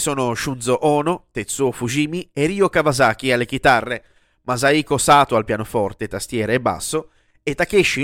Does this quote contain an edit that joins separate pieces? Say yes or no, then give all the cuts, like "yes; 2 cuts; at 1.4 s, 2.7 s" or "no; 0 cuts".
no; 0 cuts